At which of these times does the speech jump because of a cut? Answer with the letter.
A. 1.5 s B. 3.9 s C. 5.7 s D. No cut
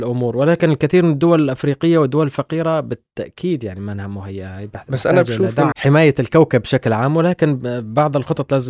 C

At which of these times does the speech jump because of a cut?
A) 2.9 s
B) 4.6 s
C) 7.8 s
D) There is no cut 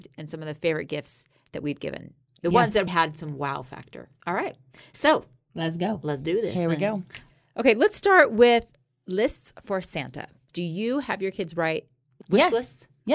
A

